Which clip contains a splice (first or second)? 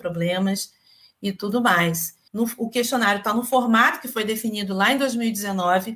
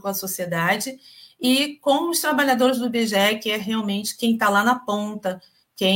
first